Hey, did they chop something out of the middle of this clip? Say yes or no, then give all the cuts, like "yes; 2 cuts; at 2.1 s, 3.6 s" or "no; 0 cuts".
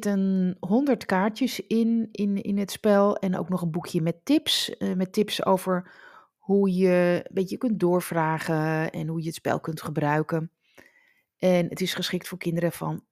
no; 0 cuts